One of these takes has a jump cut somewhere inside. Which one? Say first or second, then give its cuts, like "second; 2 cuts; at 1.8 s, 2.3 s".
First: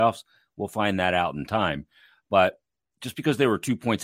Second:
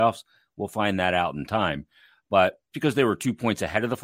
second; 1 cut; at 2.7 s